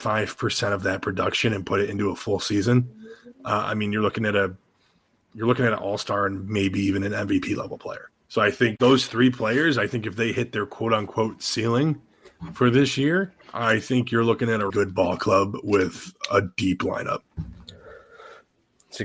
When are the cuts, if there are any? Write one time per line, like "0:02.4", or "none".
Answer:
0:13.4
0:14.7